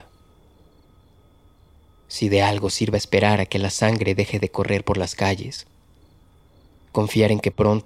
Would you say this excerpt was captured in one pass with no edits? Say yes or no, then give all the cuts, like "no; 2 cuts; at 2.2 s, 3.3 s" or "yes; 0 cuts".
yes; 0 cuts